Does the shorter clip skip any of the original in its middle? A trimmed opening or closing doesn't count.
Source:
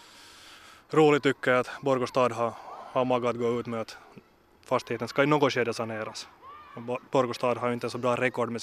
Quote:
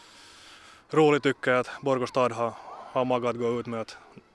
no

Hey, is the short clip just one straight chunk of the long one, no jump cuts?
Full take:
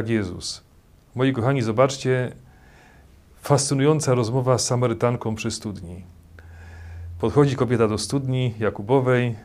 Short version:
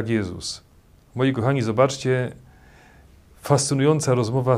yes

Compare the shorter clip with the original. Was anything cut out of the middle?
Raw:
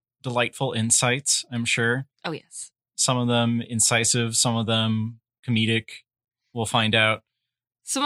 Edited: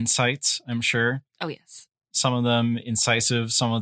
no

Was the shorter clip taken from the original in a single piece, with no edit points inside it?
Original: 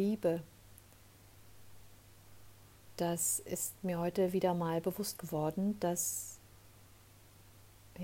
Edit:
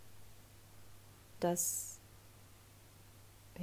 no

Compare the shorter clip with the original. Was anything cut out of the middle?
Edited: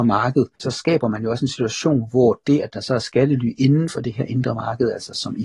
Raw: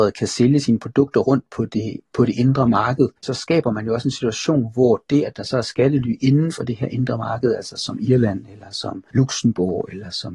no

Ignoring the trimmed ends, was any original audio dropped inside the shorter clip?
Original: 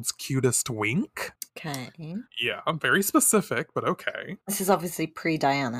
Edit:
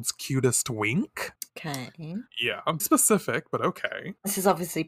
yes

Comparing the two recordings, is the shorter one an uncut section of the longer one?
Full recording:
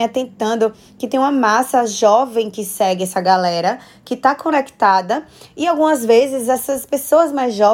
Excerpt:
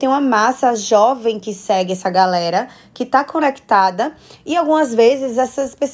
yes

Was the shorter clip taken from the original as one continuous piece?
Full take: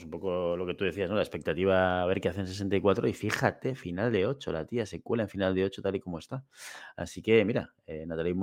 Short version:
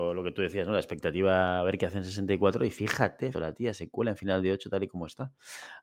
no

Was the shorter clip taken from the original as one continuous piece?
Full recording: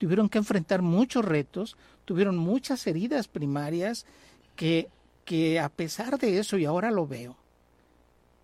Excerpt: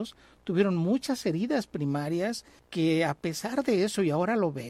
no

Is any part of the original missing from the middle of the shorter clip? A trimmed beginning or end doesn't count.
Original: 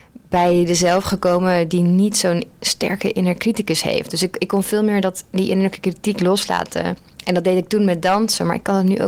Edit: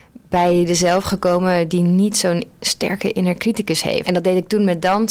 yes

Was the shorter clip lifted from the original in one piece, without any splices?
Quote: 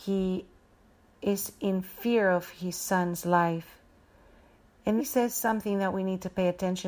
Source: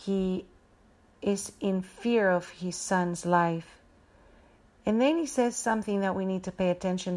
no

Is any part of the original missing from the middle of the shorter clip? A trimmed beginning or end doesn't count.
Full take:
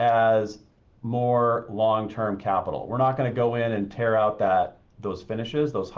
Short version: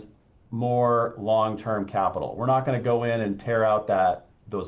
no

